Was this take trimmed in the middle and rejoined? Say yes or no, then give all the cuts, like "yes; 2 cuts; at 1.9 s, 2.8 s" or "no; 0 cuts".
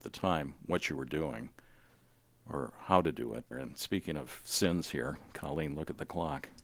yes; 1 cut; at 3.5 s